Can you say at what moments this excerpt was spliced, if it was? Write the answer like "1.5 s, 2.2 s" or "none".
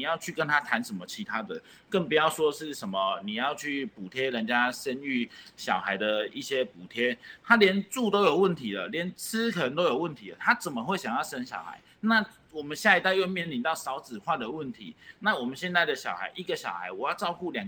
none